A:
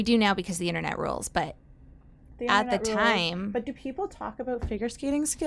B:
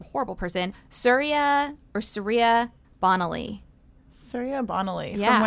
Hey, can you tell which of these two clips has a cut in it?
B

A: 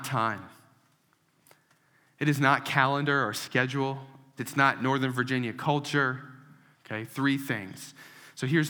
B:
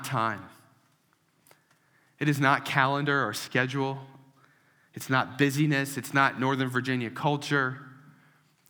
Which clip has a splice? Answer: A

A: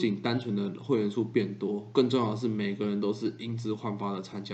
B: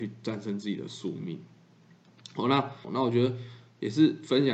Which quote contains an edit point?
B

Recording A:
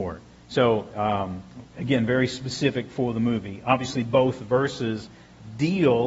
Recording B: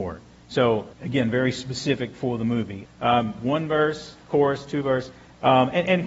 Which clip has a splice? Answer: B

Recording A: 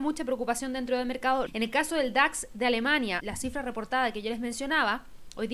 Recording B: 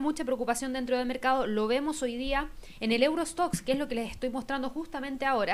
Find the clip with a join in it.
A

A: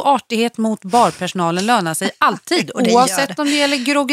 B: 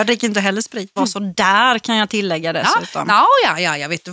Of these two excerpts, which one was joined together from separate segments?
B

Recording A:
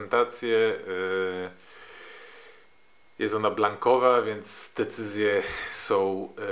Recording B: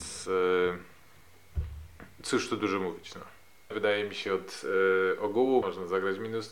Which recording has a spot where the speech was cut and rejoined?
B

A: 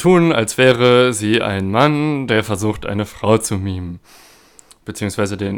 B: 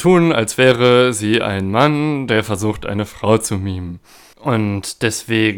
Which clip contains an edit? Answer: B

